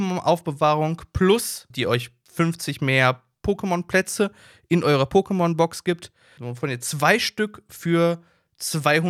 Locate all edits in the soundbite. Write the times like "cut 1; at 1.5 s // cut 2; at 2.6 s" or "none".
cut 1; at 1.7 s // cut 2; at 6.4 s

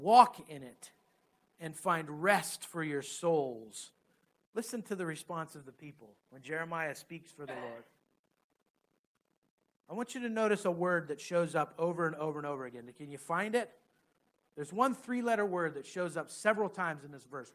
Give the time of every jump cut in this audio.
cut 1; at 4.4 s

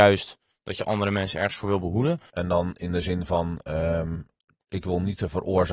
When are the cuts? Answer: cut 1; at 2.3 s

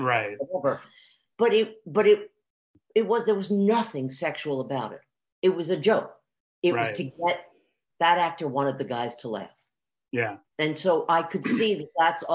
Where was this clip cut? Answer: cut 1; at 10.5 s

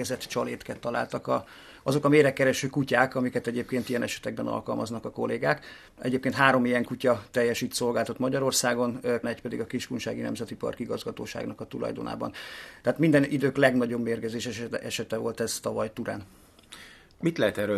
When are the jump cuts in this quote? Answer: cut 1; at 9.2 s

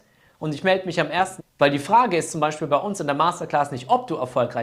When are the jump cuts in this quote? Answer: cut 1; at 1.4 s

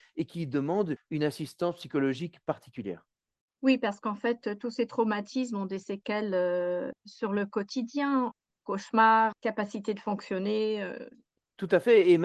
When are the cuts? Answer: none

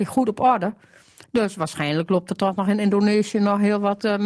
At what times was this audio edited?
none

